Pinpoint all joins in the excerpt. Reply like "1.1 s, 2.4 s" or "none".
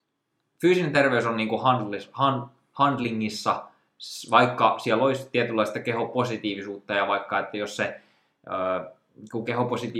none